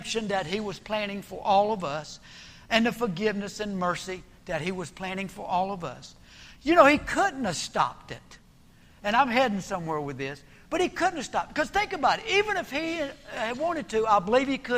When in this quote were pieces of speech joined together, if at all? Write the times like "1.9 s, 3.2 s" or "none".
none